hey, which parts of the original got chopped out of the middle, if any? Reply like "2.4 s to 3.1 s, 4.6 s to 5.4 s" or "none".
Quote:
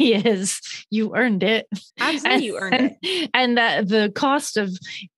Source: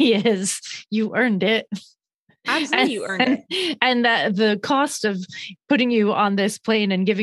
1.9 s to 2.4 s